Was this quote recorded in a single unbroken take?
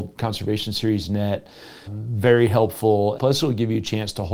no; 2 cuts; at 1.9 s, 3.2 s

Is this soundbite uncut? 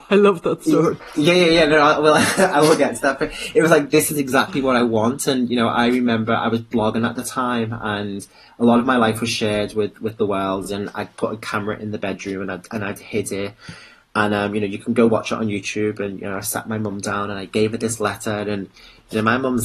yes; 0 cuts

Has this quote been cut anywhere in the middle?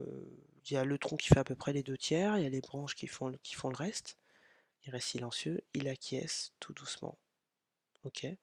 yes; 1 cut; at 4.7 s

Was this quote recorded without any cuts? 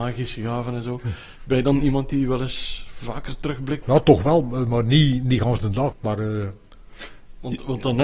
no; 2 cuts; at 3.8 s, 5.9 s

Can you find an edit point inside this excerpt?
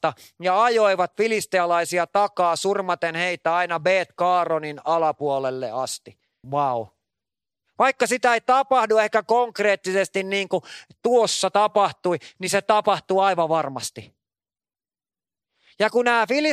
yes; 1 cut; at 6.4 s

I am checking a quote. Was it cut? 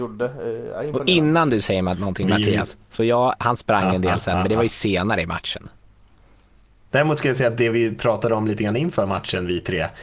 yes; 1 cut; at 6.9 s

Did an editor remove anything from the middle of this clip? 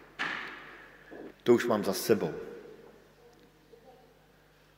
yes; 1 cut; at 1.3 s

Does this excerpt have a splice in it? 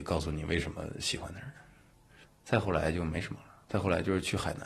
no; 0 cuts

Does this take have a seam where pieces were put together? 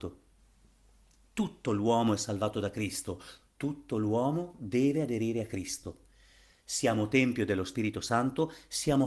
yes; 1 cut; at 3.4 s

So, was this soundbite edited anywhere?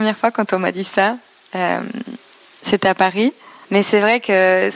yes; 1 cut; at 3.6 s

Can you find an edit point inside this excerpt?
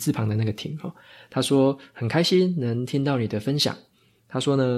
no; 0 cuts

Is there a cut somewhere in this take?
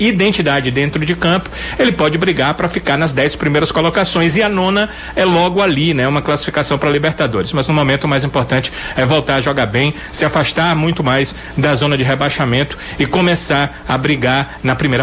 no; 0 cuts

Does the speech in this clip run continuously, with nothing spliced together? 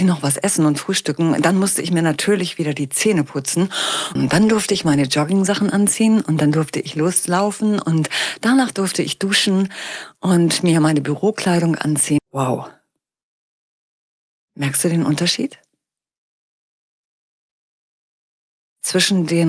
no; 2 cuts; at 4.2 s, 12.2 s

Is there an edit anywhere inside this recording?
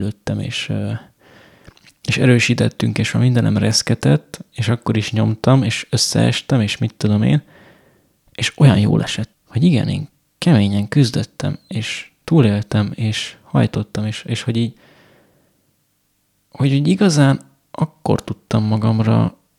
yes; 1 cut; at 9.3 s

